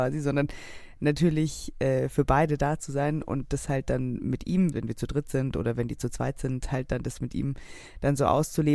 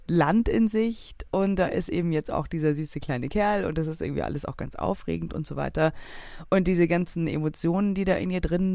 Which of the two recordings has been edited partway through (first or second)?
first